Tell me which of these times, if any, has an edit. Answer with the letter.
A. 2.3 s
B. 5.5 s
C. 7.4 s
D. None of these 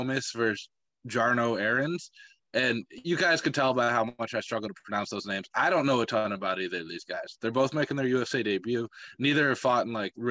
D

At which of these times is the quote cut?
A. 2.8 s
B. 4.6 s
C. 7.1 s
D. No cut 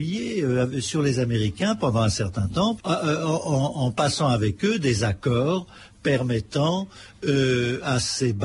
A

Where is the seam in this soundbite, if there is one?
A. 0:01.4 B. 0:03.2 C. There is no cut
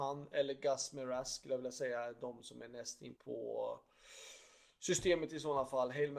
B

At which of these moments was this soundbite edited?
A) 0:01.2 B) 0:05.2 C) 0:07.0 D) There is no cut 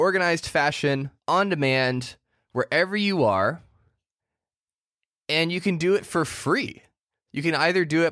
A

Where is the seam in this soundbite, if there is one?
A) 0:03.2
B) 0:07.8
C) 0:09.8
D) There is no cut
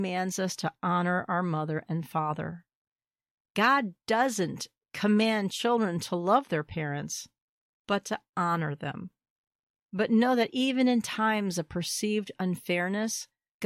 C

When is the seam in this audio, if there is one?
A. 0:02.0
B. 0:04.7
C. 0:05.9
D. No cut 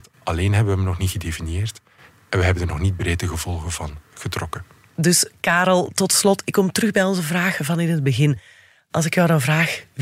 D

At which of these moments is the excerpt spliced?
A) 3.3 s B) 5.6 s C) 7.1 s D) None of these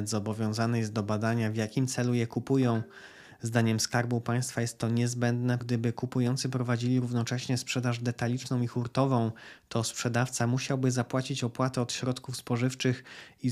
B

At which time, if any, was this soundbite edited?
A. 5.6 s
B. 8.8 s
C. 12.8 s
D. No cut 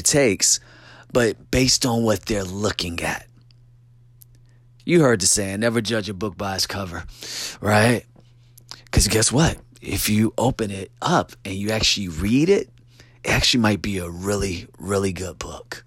D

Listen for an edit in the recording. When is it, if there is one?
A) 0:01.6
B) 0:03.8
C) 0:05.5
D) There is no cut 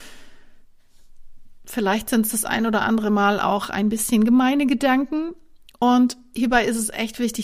D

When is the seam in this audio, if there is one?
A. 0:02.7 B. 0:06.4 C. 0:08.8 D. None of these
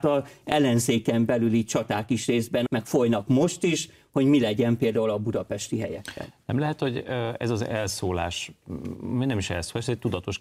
A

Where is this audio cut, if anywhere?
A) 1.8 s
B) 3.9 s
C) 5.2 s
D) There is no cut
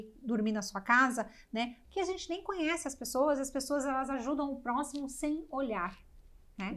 A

